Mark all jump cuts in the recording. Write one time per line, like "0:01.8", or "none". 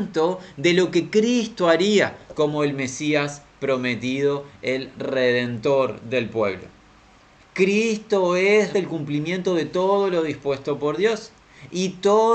0:07.4
0:08.7